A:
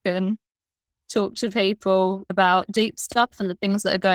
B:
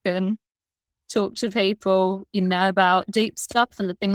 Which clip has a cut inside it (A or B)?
A